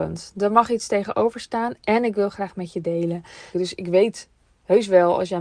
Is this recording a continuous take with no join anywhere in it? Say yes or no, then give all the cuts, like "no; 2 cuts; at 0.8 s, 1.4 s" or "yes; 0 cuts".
no; 1 cut; at 3.5 s